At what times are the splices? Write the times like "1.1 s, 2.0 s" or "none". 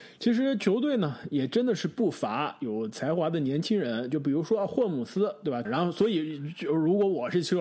5.6 s